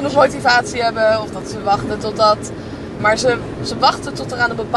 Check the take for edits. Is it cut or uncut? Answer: cut